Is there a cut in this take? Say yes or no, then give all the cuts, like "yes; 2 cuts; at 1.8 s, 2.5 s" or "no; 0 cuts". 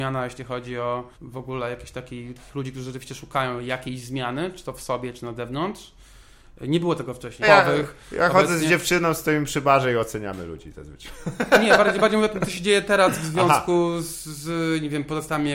yes; 2 cuts; at 1.1 s, 7.4 s